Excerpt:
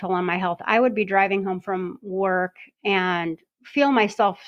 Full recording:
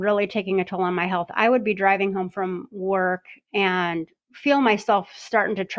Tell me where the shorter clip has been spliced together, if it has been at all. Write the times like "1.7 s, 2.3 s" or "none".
none